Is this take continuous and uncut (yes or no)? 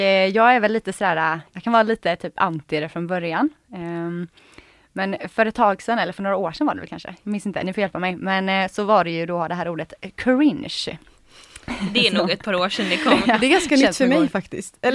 no